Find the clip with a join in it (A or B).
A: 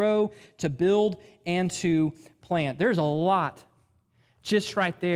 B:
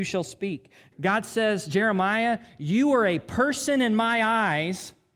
B